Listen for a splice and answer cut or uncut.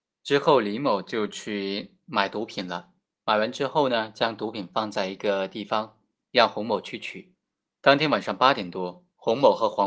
cut